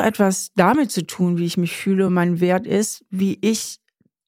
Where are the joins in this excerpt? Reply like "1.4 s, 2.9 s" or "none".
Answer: none